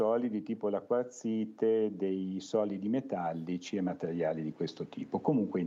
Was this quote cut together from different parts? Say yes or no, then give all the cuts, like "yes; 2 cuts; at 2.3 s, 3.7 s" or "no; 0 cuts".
no; 0 cuts